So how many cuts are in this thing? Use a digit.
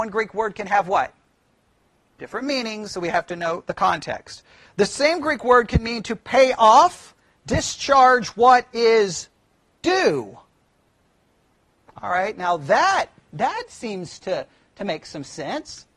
1